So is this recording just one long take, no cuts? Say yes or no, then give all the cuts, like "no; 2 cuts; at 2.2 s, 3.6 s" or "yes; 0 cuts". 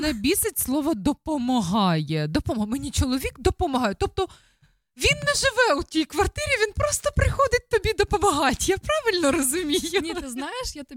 yes; 0 cuts